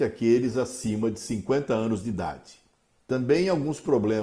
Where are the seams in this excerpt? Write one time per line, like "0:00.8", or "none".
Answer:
0:03.0